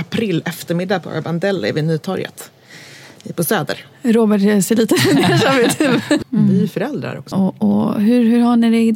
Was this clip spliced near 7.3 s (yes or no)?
yes